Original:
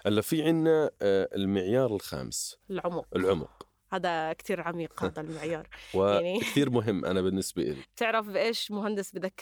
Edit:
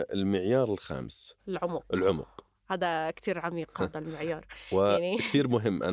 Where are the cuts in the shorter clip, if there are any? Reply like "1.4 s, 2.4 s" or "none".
none